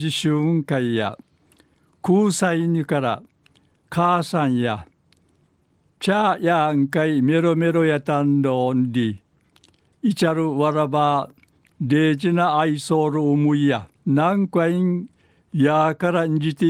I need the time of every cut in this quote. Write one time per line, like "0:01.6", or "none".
0:13.9